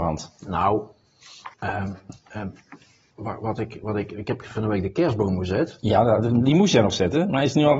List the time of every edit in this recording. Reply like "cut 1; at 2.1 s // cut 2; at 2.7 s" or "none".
cut 1; at 1.5 s